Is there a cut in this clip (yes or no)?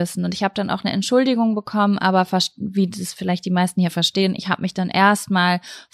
no